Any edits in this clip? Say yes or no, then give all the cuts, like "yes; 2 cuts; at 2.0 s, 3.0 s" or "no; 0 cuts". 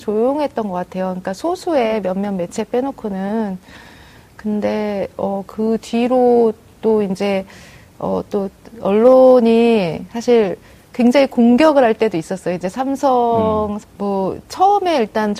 yes; 1 cut; at 13.8 s